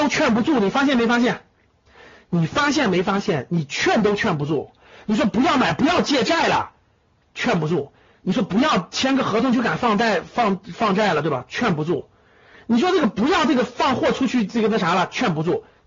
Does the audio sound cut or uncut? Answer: uncut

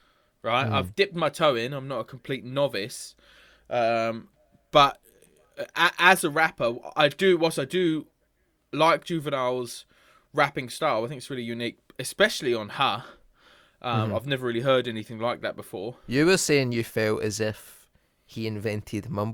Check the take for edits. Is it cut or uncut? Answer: uncut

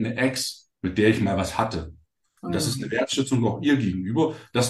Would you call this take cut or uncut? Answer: cut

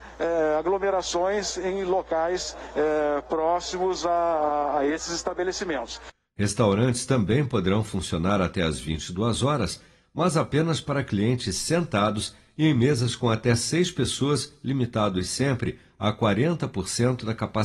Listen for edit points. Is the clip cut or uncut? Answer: uncut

